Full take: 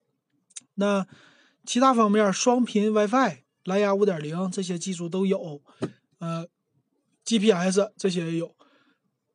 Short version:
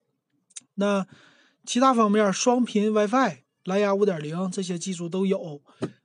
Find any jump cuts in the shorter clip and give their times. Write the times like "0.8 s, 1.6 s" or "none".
none